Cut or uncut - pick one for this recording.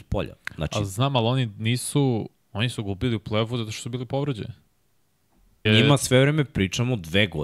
cut